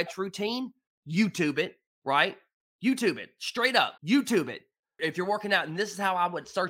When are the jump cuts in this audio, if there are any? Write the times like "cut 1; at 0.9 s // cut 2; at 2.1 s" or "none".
cut 1; at 4.0 s

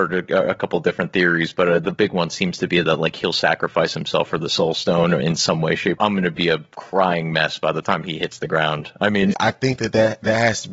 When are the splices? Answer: cut 1; at 6.0 s // cut 2; at 9.3 s

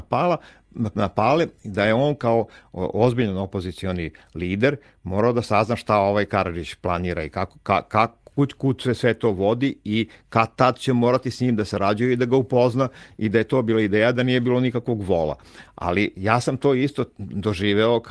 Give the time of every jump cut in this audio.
none

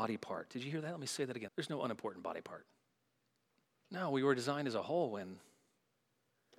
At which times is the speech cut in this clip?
cut 1; at 1.5 s // cut 2; at 3.7 s

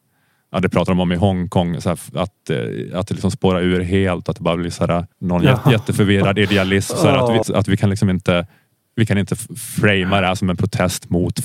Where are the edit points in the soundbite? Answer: cut 1; at 5.1 s // cut 2; at 7.4 s

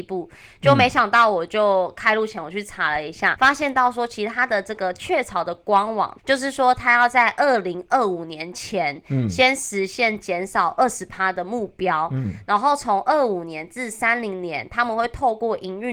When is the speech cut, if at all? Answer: cut 1; at 3.3 s // cut 2; at 6.2 s

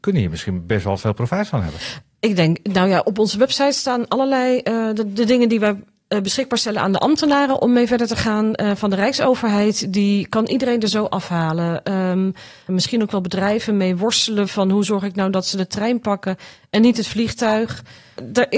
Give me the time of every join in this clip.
cut 1; at 12.7 s

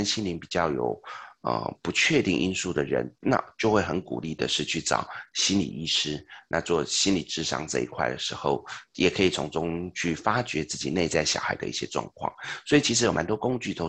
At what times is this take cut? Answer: none

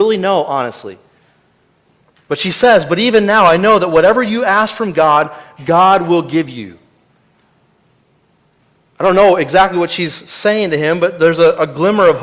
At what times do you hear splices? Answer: none

